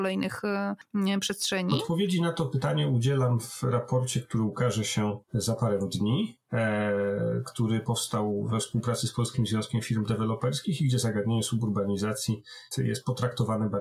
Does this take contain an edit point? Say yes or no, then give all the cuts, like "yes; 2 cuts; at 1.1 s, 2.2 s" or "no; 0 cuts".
yes; 2 cuts; at 5.2 s, 12.7 s